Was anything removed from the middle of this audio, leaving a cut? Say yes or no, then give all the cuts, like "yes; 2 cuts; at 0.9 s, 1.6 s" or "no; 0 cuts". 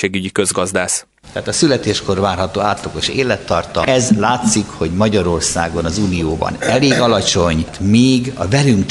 no; 0 cuts